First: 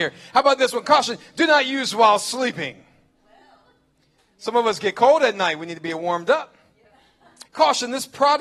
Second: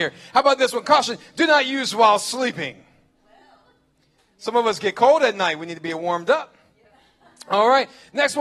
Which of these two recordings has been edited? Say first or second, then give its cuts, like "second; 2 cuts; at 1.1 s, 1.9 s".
first; 1 cut; at 7.5 s